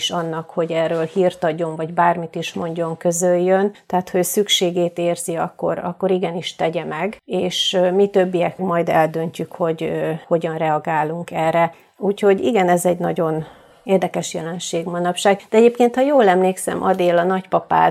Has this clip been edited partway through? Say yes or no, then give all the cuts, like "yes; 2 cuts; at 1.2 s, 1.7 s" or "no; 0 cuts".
yes; 1 cut; at 8.6 s